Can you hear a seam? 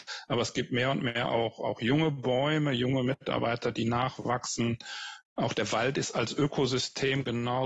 yes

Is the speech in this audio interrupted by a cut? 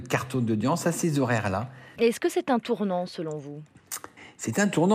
yes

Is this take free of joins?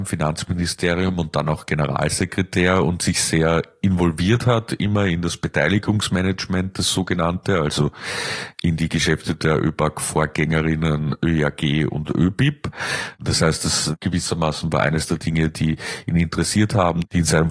yes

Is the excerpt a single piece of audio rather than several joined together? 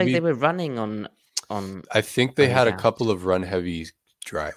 yes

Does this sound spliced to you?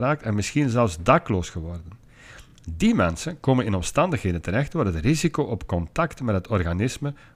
no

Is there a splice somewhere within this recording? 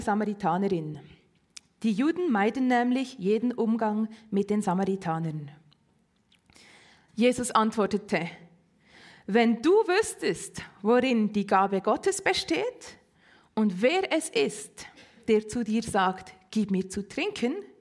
no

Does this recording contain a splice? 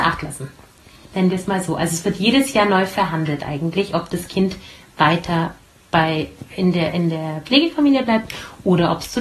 no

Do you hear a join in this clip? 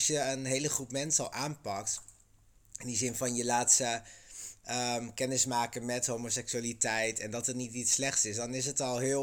no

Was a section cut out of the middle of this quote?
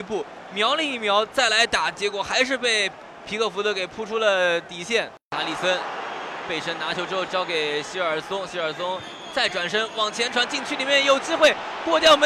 no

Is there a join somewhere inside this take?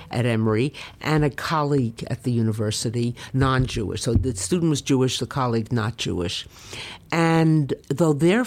no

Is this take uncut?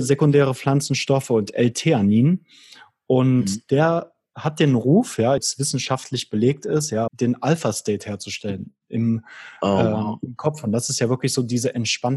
no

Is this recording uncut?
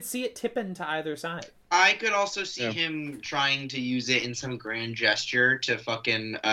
yes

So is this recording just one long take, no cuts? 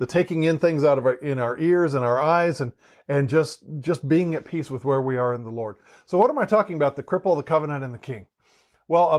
yes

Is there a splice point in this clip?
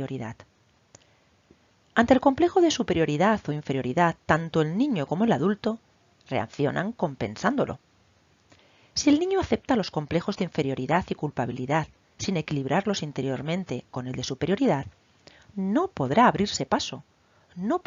no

